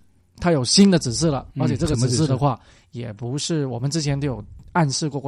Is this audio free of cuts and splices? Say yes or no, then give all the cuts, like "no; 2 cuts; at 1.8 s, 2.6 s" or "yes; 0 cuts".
yes; 0 cuts